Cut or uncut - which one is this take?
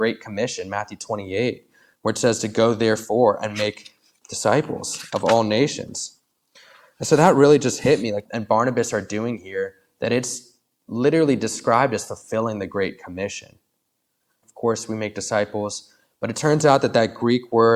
cut